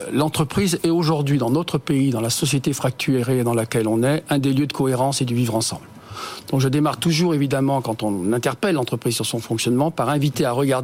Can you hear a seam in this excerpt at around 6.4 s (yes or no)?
no